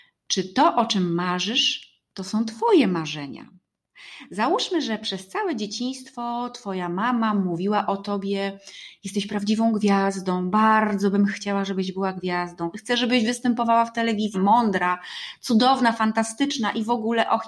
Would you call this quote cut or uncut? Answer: cut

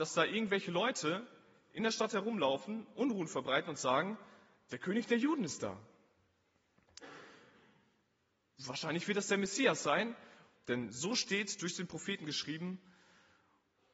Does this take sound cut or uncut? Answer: cut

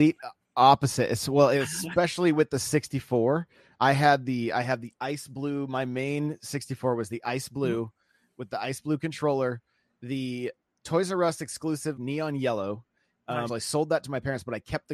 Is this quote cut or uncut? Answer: cut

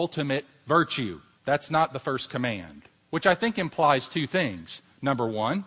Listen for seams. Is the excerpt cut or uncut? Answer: cut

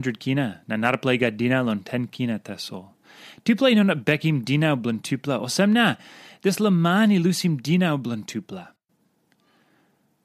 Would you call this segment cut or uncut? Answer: uncut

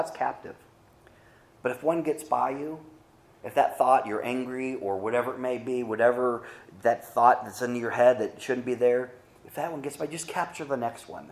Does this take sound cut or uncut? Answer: uncut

